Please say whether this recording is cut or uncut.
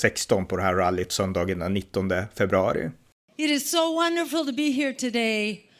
uncut